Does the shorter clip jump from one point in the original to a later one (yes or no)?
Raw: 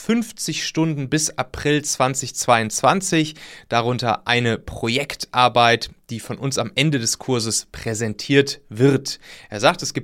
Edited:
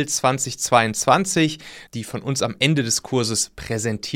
yes